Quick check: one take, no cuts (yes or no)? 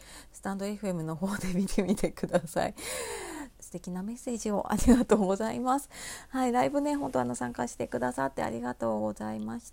no